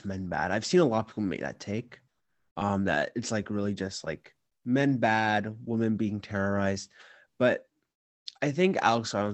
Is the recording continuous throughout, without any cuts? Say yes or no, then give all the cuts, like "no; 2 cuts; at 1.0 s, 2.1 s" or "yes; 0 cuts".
yes; 0 cuts